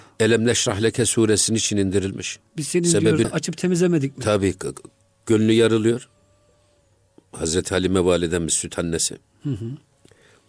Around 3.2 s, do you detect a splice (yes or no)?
yes